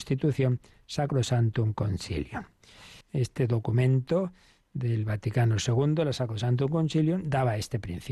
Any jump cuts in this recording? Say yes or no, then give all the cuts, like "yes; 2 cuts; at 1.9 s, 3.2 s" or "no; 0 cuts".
yes; 1 cut; at 3.0 s